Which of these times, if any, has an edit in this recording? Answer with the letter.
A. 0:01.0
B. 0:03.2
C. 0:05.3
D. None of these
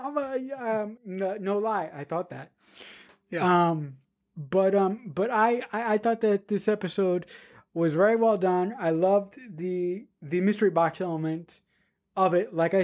A